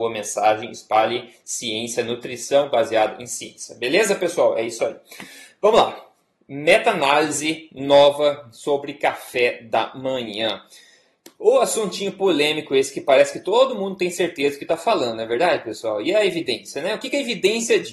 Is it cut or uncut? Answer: uncut